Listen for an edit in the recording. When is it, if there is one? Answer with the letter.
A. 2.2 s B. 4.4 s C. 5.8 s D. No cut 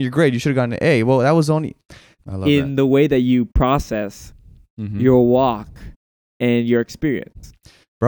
A